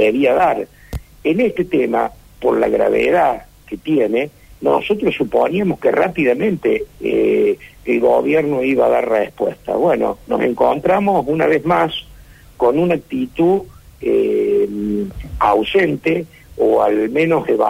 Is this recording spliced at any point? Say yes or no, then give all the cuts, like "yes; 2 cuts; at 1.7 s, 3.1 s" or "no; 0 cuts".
no; 0 cuts